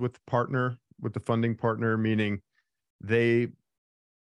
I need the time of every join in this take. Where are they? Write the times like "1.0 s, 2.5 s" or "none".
none